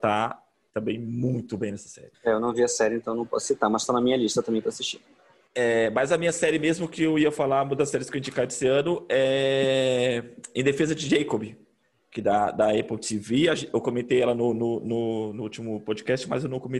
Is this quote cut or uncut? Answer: uncut